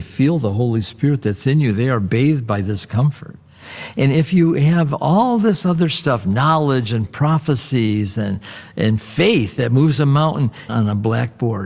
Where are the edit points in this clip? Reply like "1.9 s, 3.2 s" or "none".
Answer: 10.7 s